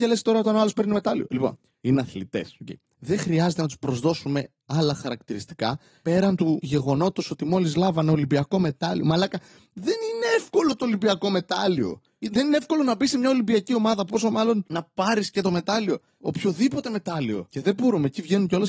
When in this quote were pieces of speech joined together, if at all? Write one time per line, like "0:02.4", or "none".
0:01.3
0:17.5